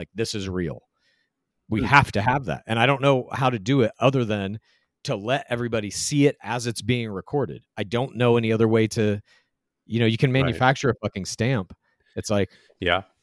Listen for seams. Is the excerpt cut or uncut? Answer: uncut